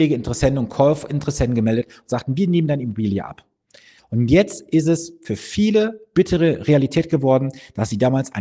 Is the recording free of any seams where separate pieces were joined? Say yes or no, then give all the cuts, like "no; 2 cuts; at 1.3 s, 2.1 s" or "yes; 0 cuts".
no; 1 cut; at 4.0 s